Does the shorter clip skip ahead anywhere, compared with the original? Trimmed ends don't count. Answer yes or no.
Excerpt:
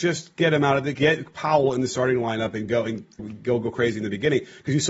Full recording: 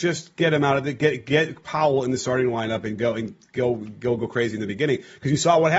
yes